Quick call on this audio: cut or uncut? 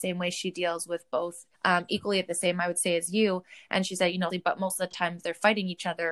cut